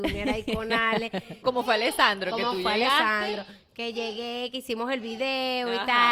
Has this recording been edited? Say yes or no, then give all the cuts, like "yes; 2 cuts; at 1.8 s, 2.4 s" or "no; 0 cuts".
yes; 1 cut; at 1.4 s